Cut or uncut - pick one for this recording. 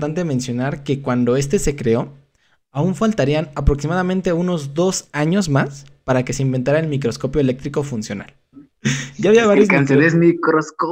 cut